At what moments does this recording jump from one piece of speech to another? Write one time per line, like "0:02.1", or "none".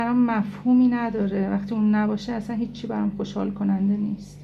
none